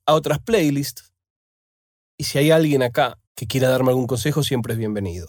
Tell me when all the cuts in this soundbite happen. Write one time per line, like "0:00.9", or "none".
0:02.1
0:03.3